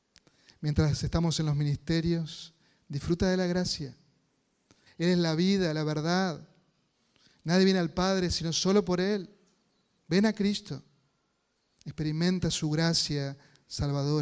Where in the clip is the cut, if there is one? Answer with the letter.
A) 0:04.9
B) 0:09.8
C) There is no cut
A